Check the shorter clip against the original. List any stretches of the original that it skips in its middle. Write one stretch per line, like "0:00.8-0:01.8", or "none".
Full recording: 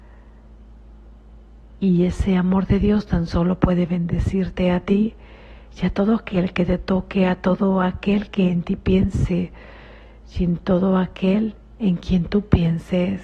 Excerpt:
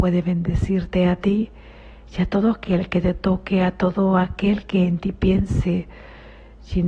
none